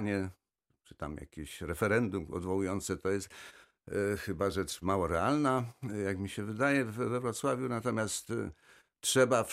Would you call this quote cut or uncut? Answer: uncut